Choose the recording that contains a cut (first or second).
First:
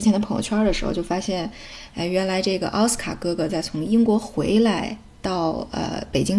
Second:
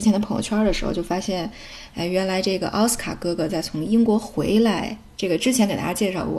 second